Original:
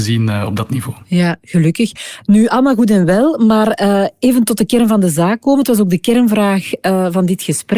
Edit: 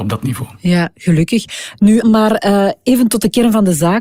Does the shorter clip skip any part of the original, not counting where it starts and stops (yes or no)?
yes